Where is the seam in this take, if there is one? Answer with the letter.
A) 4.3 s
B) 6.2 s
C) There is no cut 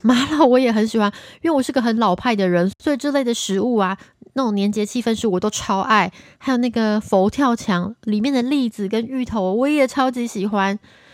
C